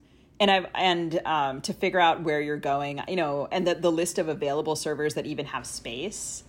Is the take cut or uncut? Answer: uncut